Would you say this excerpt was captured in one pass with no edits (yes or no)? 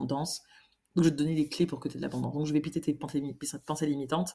yes